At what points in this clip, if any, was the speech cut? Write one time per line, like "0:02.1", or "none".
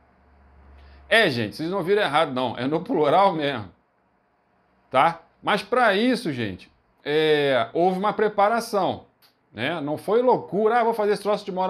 none